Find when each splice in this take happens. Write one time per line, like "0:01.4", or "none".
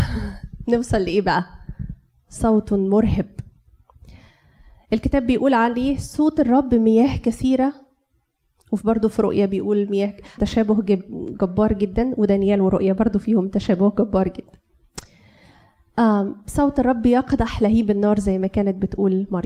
0:10.4